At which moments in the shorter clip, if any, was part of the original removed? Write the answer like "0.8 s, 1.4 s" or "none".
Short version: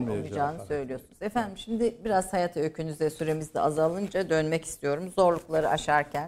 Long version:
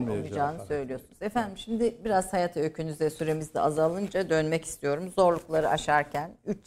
none